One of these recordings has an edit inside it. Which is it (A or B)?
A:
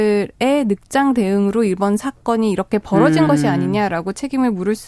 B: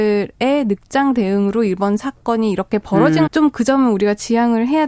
B